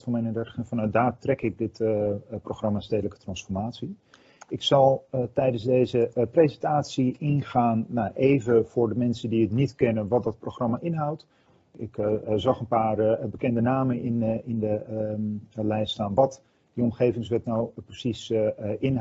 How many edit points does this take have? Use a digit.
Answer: 0